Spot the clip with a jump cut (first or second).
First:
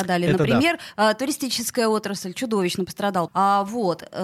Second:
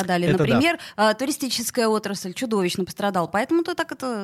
first